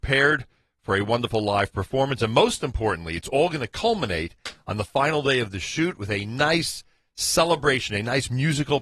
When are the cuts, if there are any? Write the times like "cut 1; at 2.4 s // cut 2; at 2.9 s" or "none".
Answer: none